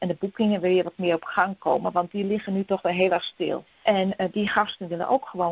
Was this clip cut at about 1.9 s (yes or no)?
no